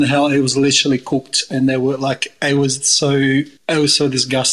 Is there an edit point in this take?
yes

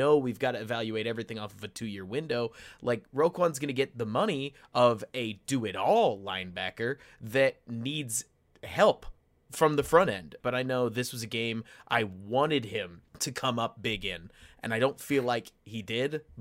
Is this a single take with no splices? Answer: no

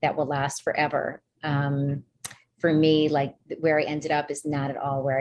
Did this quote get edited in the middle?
no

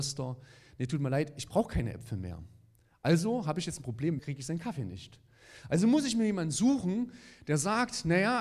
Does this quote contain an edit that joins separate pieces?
yes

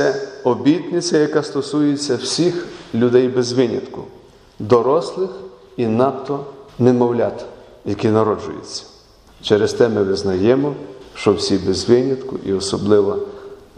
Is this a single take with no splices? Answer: yes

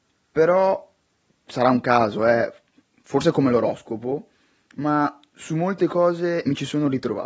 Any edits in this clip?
no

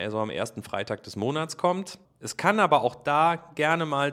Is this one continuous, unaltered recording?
no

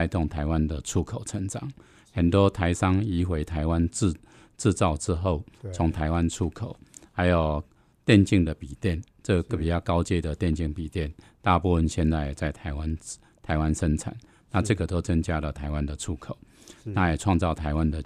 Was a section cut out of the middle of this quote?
no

